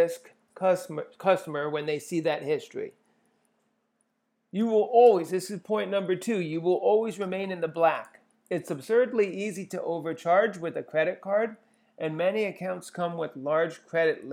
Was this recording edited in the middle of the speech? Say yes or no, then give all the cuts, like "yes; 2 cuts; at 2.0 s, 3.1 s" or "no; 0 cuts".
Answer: no; 0 cuts